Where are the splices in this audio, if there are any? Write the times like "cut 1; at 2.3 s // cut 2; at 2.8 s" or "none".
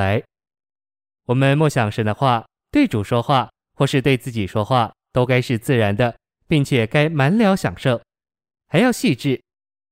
cut 1; at 8.6 s